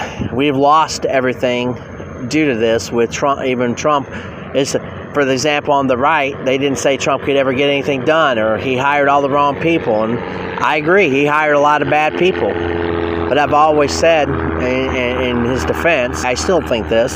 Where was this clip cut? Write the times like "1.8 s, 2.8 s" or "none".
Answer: 16.2 s